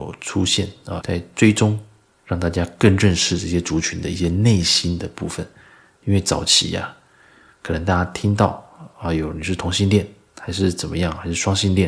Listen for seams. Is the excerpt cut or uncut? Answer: cut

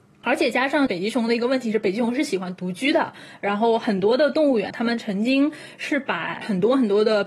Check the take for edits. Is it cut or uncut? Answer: cut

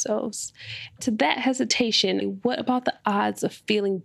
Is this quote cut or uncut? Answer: cut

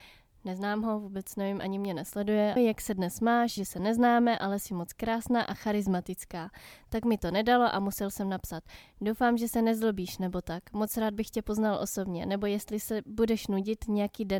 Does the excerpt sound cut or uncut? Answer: cut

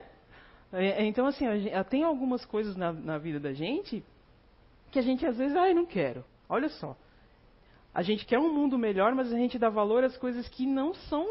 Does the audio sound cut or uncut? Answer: cut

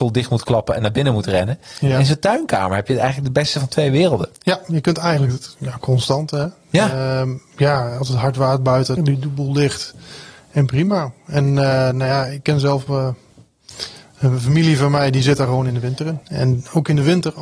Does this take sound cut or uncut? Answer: cut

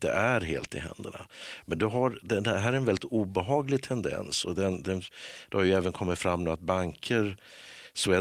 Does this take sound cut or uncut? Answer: uncut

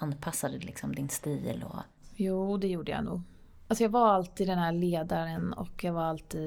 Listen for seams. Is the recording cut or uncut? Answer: uncut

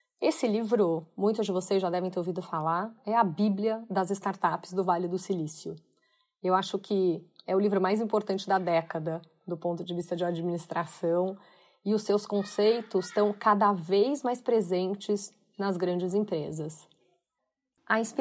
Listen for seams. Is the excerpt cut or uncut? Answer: uncut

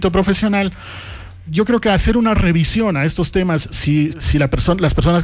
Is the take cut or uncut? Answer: cut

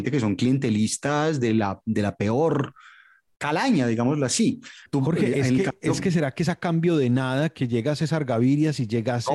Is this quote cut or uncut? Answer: cut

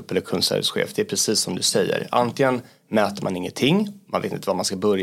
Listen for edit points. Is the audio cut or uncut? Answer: uncut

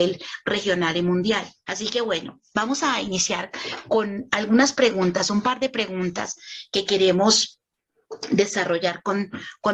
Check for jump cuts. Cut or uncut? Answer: cut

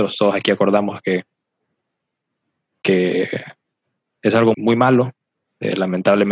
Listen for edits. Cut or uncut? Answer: cut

